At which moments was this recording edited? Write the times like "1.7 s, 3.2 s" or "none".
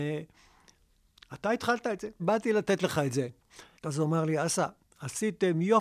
2.2 s, 3.7 s